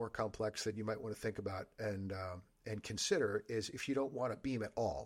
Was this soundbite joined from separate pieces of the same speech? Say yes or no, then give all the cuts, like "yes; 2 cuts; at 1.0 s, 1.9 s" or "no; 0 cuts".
no; 0 cuts